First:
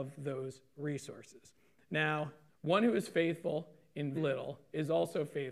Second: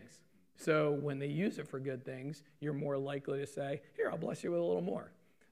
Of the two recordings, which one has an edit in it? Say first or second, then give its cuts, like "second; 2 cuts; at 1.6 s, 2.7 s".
first; 2 cuts; at 2.5 s, 4.2 s